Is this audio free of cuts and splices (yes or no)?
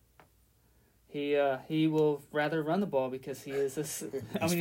yes